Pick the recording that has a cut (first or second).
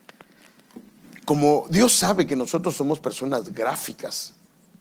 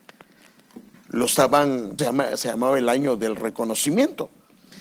second